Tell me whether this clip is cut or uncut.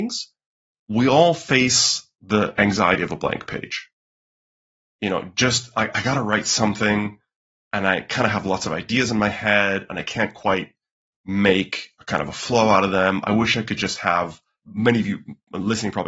uncut